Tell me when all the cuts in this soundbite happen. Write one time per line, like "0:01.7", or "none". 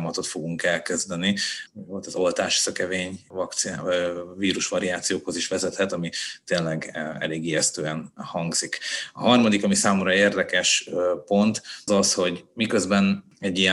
0:01.7
0:11.9